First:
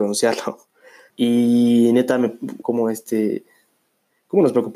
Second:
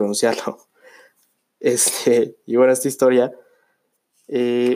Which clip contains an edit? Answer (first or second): first